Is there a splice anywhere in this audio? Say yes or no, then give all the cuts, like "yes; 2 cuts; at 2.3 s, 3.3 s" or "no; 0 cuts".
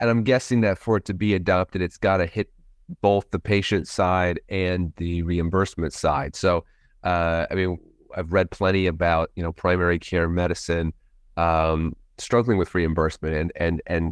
no; 0 cuts